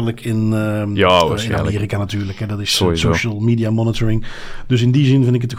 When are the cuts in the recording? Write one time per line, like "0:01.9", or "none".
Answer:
none